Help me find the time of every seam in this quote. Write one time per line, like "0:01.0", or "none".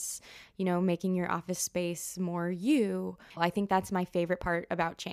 0:03.4